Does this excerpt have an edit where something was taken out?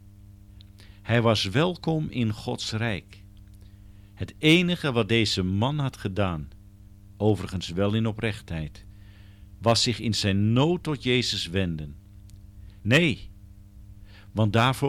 yes; 1 cut; at 12.8 s

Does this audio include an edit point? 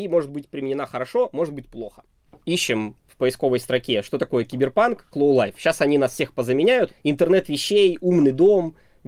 yes; 2 cuts; at 5.1 s, 6.9 s

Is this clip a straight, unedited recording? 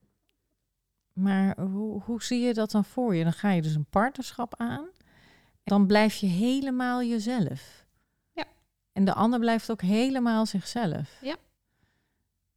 no; 1 cut; at 5.7 s

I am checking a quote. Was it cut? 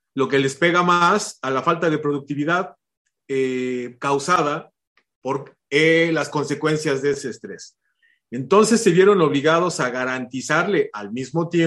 no; 0 cuts

